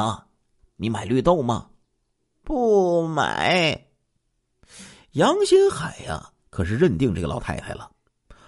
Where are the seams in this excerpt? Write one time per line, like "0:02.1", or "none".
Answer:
none